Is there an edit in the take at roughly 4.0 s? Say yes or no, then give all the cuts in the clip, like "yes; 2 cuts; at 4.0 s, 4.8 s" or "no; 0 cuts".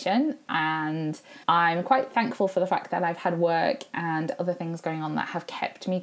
no; 1 cut; at 1.4 s